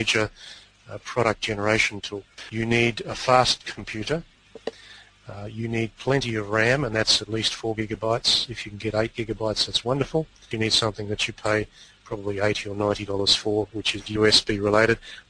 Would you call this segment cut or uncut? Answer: cut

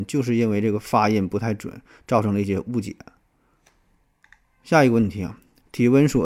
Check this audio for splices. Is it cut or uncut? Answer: uncut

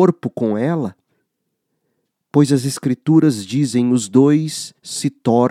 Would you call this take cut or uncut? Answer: uncut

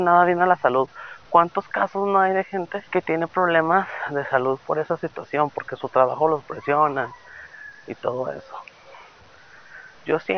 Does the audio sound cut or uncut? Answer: cut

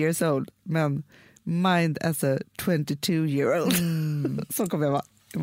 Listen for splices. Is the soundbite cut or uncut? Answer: uncut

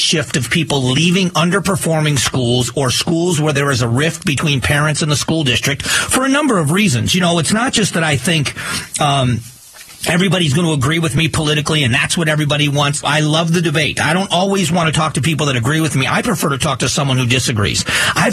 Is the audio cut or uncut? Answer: cut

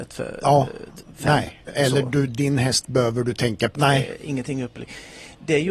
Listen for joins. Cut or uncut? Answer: cut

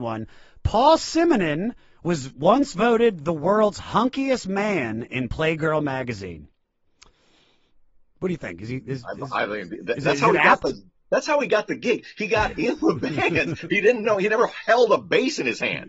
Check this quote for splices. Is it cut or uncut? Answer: uncut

